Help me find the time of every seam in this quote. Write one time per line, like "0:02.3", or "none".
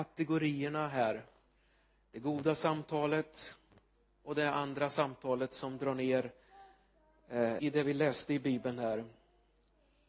0:07.6